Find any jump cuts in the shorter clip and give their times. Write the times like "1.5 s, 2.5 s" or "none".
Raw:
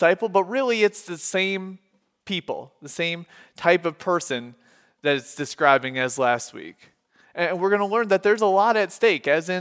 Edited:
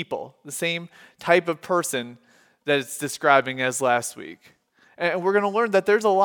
none